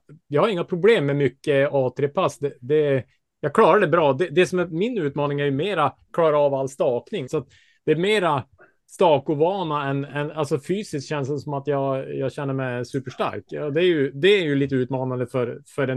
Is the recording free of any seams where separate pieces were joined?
no; 1 cut; at 7.3 s

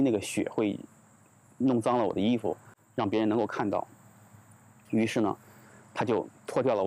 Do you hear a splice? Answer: no; 0 cuts

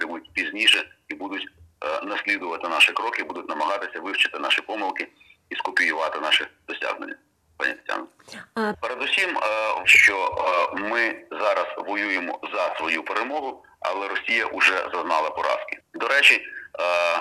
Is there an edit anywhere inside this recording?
yes; 3 cuts; at 8.7 s, 9.8 s, 15.8 s

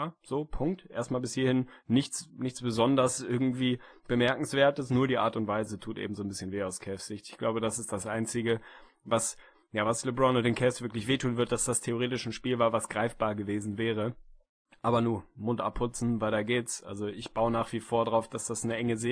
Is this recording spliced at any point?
no; 0 cuts

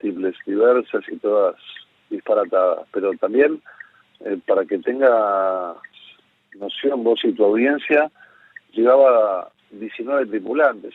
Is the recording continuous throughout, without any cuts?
yes; 0 cuts

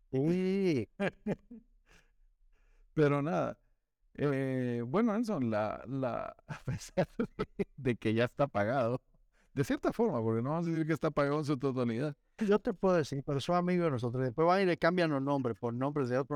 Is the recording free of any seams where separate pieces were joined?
no; 2 cuts; at 6.4 s, 12.4 s

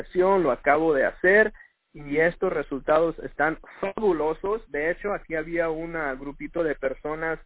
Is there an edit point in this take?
no; 0 cuts

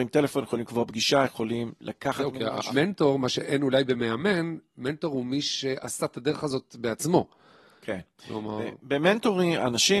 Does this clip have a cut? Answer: yes; 1 cut; at 2.7 s

